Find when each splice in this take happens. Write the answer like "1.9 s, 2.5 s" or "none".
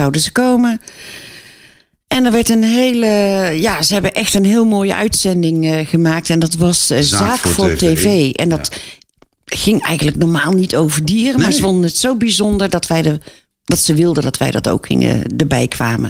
none